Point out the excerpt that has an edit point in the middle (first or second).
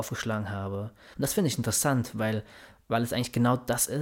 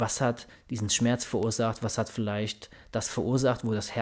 first